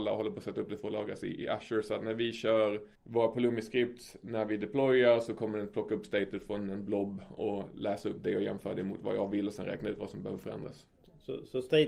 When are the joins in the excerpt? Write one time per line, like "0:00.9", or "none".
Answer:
0:02.9